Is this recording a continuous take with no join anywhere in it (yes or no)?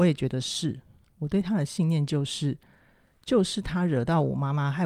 no